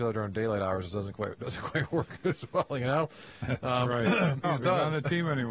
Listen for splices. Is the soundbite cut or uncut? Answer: cut